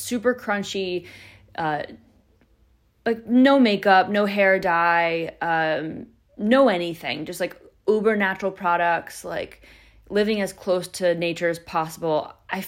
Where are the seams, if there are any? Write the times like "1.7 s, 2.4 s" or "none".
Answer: none